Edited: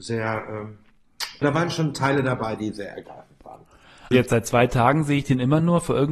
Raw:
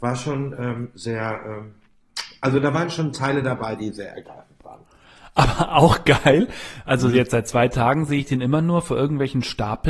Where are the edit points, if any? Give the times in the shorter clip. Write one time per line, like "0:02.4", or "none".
0:01.4
0:04.1